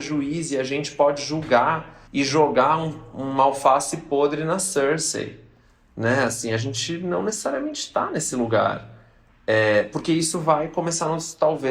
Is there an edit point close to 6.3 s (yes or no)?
no